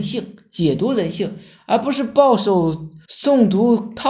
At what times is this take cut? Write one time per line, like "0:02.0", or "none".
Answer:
0:03.1